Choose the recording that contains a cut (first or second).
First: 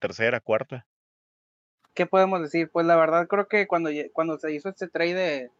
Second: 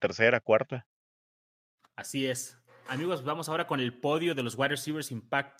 first